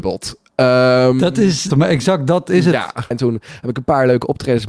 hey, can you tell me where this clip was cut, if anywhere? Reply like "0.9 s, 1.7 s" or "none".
1.7 s, 3.1 s